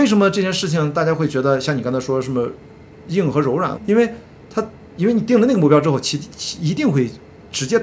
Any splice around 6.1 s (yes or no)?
no